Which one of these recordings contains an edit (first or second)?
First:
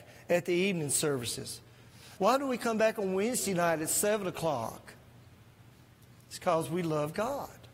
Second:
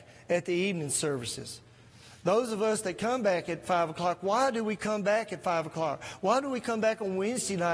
first